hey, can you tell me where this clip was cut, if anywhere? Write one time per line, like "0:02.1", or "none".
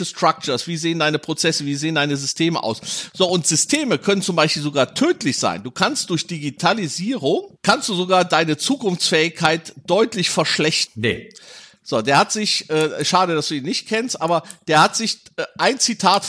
0:10.9